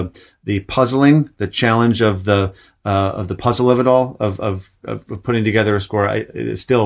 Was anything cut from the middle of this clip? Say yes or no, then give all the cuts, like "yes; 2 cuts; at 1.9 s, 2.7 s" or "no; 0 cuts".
no; 0 cuts